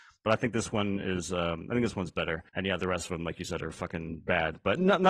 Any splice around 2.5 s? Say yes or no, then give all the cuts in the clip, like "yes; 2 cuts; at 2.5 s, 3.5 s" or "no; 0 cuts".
yes; 1 cut; at 2.5 s